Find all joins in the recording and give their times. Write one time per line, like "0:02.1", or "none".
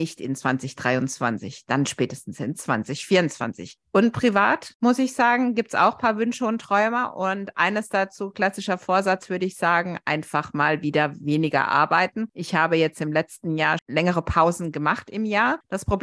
0:13.8